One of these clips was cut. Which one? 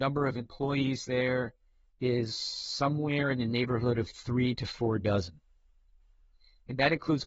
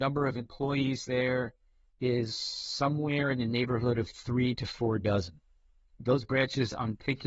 second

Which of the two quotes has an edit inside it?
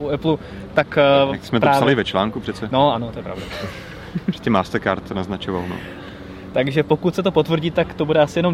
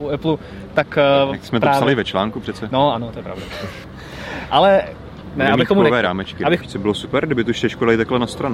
second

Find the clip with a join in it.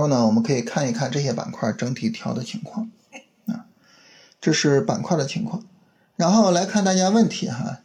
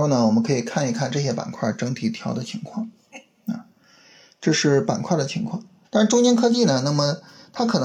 second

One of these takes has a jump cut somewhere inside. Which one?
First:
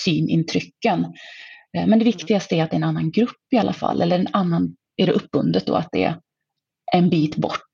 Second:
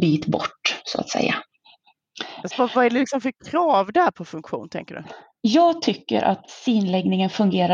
second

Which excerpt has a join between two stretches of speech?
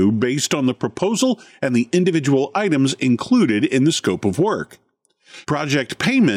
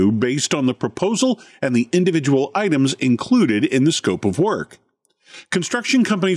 first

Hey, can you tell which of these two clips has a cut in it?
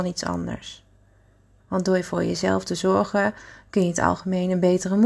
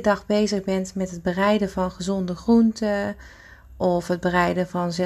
first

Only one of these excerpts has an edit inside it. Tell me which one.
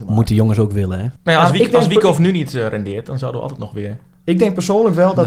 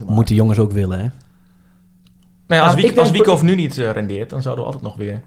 first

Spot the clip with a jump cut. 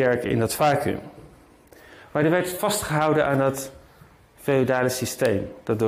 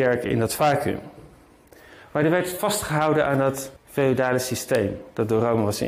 second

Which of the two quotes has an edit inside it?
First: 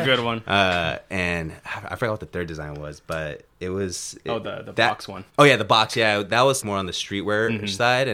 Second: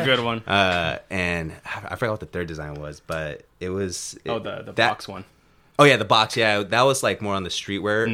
first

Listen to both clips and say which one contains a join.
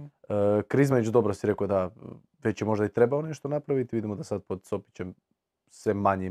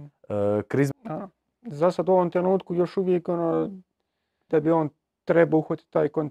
second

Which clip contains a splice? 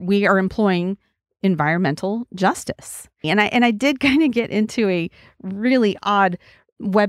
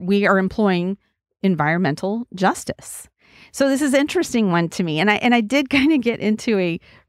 first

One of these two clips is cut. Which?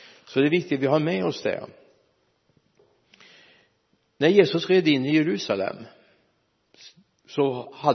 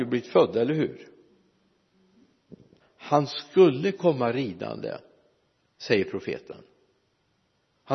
second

